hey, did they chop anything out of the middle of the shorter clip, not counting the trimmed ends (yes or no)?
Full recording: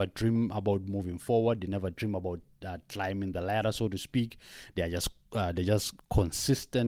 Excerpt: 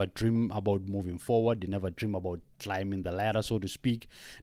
yes